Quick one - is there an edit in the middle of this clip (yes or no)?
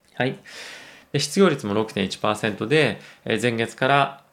yes